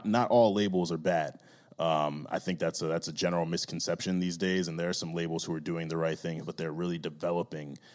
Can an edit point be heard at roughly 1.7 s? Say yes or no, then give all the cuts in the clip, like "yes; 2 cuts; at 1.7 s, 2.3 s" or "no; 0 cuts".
no; 1 cut; at 6.4 s